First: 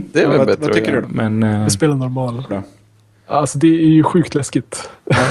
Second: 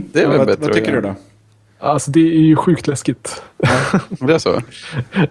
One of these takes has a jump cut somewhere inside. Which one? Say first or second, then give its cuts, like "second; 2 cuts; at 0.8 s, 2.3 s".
first; 2 cuts; at 1.0 s, 2.5 s